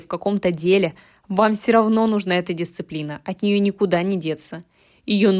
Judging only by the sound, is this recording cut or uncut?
uncut